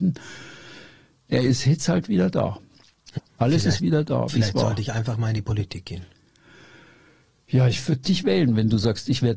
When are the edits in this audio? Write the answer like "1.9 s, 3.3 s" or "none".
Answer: 3.2 s